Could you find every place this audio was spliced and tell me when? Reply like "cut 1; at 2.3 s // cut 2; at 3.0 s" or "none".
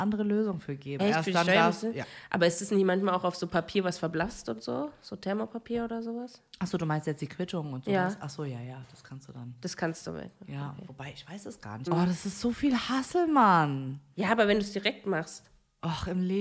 cut 1; at 1.0 s // cut 2; at 11.9 s